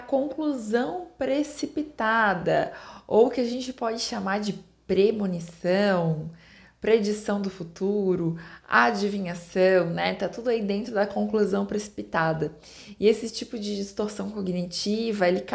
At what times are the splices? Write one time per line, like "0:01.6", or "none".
none